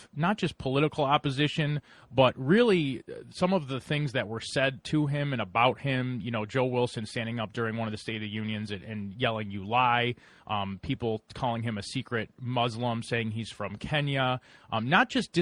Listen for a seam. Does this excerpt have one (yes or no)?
no